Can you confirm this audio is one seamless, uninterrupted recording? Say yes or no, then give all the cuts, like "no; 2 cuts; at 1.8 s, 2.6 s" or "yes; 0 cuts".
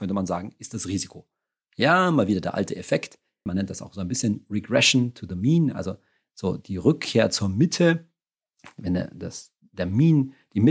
no; 1 cut; at 3.5 s